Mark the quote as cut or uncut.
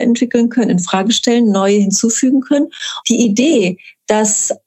cut